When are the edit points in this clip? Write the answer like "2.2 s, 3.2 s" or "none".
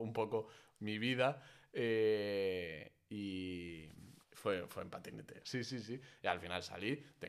4.2 s, 5.4 s